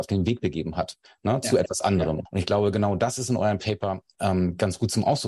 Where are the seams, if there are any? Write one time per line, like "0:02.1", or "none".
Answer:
0:02.3